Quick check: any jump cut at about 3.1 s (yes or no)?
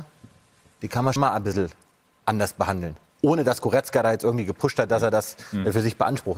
no